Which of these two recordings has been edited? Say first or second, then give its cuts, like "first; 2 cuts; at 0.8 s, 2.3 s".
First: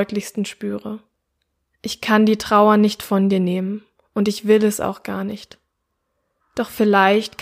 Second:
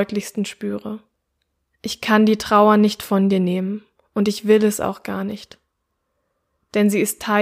first; 1 cut; at 6.4 s